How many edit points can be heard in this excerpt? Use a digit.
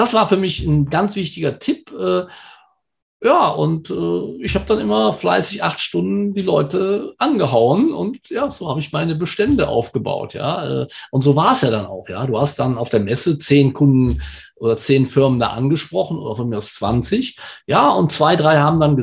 0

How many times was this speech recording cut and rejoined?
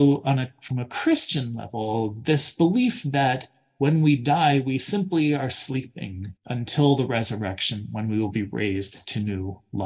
1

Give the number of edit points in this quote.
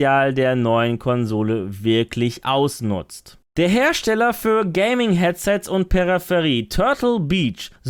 1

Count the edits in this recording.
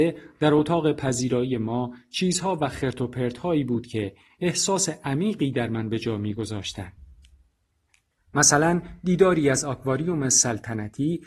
1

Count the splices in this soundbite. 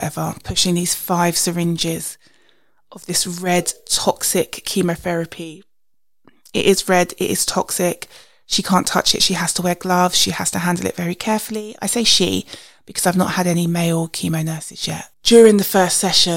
1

